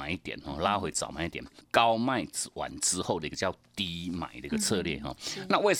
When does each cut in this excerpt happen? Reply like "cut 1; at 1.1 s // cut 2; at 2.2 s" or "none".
cut 1; at 1.6 s